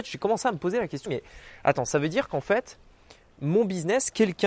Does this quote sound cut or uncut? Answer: cut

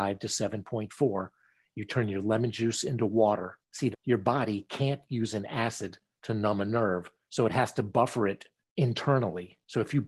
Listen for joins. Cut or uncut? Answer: cut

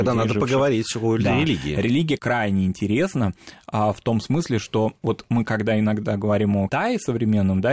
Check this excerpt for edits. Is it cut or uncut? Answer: cut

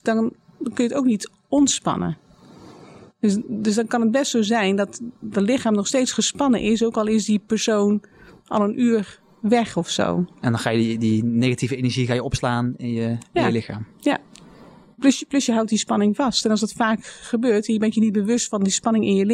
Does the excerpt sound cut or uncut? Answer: uncut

